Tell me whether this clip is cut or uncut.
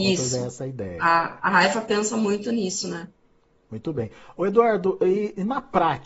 uncut